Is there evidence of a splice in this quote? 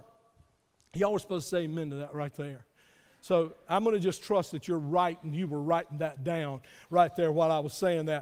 no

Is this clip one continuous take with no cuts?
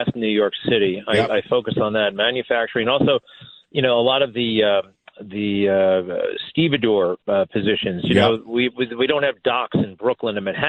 yes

